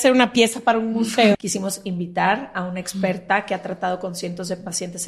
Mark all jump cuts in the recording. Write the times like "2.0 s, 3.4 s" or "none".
1.3 s